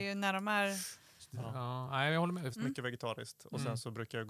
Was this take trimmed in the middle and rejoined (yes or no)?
yes